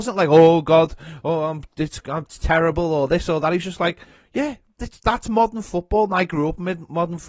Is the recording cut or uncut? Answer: uncut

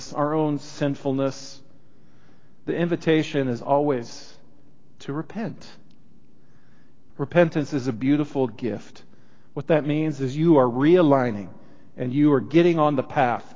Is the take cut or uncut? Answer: cut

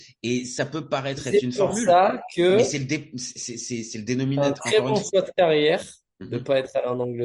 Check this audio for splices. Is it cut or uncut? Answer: uncut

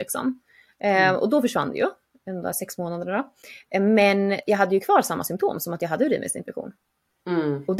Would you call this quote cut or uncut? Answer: uncut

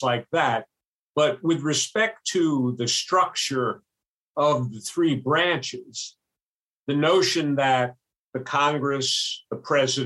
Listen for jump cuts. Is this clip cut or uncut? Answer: uncut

